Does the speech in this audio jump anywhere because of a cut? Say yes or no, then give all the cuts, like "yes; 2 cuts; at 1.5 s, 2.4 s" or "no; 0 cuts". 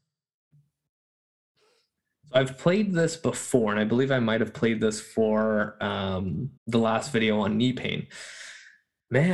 yes; 1 cut; at 6.6 s